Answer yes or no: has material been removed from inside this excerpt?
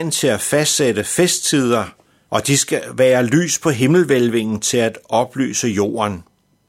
yes